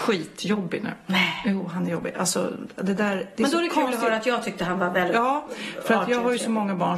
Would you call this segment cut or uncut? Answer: uncut